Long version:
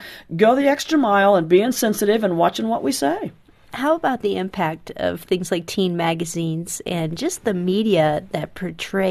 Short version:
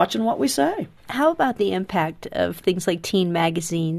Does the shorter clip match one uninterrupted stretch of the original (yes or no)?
no